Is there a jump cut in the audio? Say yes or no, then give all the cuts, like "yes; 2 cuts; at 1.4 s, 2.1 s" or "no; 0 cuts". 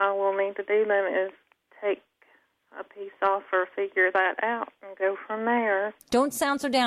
no; 0 cuts